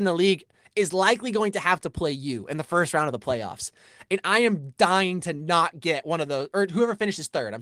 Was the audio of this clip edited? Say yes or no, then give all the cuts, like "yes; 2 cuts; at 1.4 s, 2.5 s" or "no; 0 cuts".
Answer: no; 0 cuts